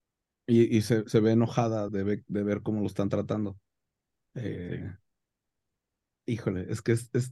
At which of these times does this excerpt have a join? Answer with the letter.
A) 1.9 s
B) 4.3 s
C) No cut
A